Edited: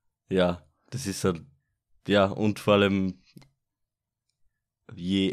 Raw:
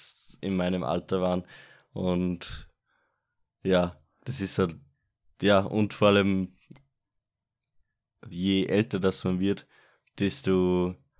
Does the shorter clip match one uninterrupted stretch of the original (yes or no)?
yes